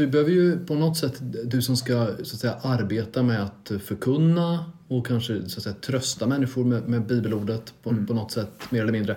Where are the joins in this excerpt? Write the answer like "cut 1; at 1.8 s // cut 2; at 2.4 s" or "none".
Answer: none